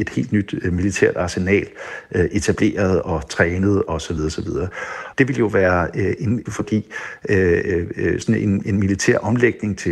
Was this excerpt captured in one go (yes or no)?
no